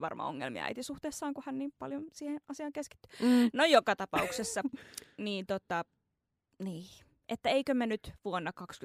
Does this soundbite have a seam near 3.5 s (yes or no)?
no